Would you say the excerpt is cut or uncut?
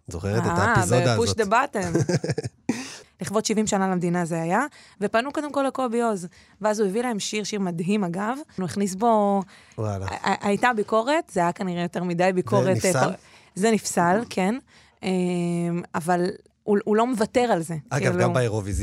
cut